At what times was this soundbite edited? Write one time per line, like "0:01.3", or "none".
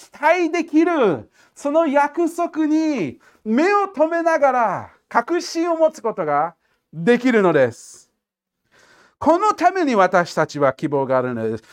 none